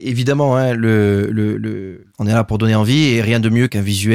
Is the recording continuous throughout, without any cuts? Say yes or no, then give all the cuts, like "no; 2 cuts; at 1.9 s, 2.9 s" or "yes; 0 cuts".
yes; 0 cuts